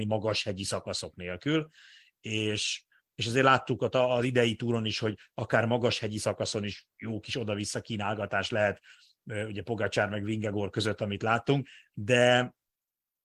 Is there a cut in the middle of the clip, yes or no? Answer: no